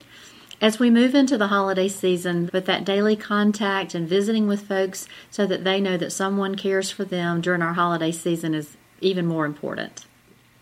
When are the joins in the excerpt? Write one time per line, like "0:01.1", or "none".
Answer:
0:02.5